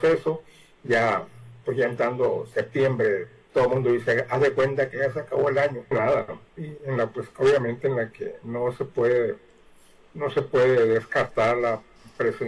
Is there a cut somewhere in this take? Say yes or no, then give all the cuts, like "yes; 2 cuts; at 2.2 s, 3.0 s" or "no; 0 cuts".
yes; 1 cut; at 5.9 s